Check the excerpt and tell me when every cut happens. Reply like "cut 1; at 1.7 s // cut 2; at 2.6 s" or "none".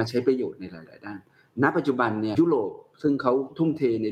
cut 1; at 2.3 s